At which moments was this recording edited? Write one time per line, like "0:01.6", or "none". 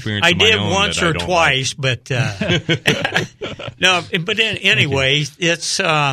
none